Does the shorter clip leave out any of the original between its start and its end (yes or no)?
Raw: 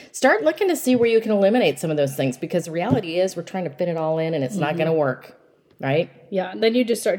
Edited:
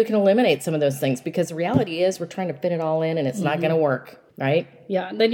yes